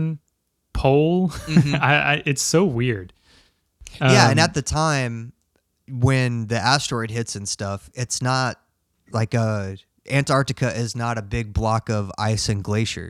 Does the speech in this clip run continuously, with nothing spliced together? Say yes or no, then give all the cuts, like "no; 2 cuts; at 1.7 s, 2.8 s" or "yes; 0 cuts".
yes; 0 cuts